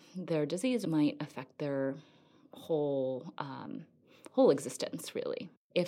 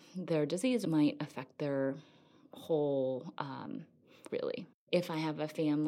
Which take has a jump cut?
second; 1 cut; at 4.3 s

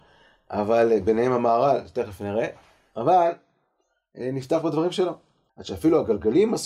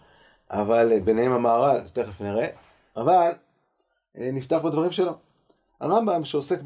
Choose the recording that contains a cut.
first; 1 cut; at 5.5 s

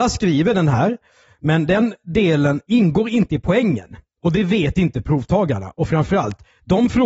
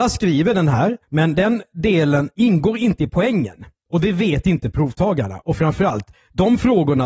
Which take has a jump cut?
second; 1 cut; at 1.0 s

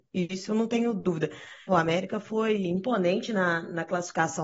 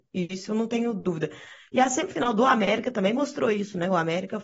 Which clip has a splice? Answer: first; 1 cut; at 1.7 s

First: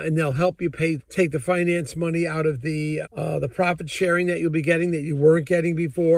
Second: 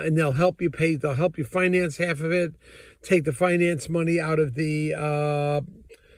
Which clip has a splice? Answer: first; 2 cuts; at 1.0 s, 3.0 s

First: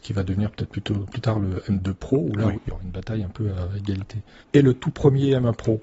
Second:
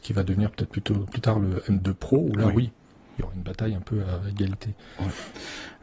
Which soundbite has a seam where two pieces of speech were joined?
first; 2 cuts; at 2.5 s, 4.4 s

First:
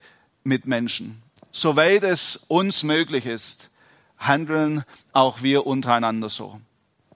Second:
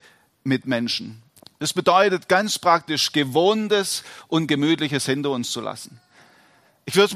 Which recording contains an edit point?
second; 1 cut; at 1.4 s

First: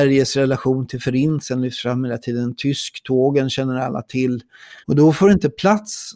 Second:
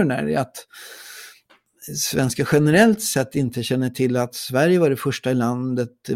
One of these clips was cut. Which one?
first; 1 cut; at 4.8 s

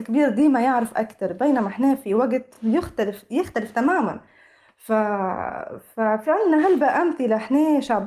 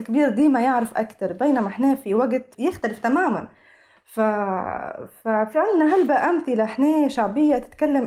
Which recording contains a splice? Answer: second; 1 cut; at 2.5 s

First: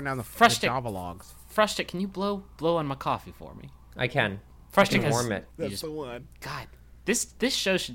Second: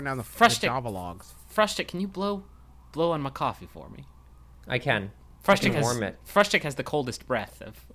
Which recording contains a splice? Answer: first; 3 cuts; at 2.5 s, 3.8 s, 5.5 s

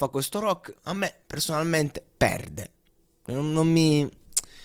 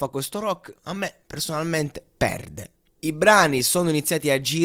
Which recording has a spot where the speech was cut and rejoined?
second; 1 cut; at 3.0 s

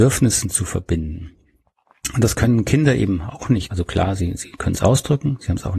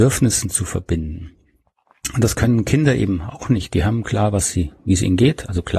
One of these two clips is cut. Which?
first; 1 cut; at 3.7 s

